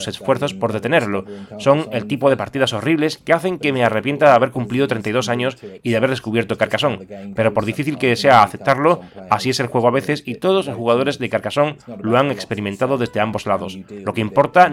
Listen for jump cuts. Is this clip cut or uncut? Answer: uncut